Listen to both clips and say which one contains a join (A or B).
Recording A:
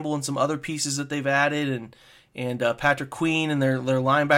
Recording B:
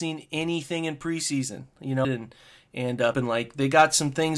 B